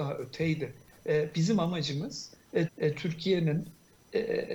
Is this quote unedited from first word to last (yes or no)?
no